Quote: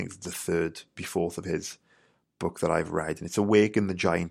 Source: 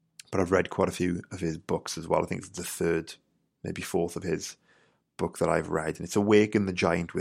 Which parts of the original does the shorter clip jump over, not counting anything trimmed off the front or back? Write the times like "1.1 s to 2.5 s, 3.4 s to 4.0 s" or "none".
3.3 s to 3.7 s